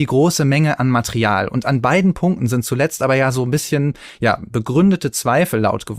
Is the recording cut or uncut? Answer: uncut